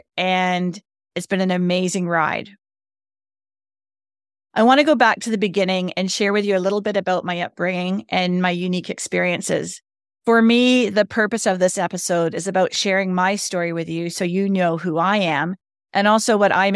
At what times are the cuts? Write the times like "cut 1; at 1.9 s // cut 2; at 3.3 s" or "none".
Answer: none